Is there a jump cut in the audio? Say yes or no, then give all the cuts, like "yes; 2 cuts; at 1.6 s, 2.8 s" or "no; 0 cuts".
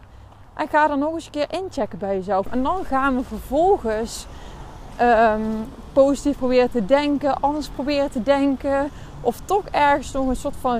yes; 1 cut; at 2.5 s